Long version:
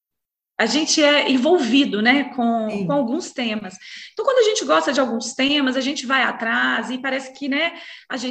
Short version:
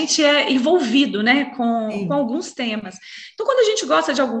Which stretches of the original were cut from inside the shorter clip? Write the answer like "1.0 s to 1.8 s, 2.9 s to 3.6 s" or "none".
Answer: none